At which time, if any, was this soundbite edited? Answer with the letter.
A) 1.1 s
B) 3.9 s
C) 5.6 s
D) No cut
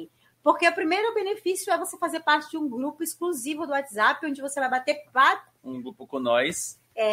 D